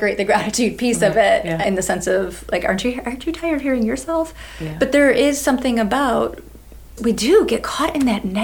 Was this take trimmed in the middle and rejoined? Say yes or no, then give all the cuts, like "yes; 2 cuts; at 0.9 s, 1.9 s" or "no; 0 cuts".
no; 0 cuts